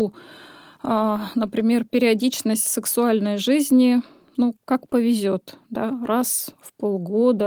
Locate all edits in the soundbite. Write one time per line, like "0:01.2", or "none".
0:04.6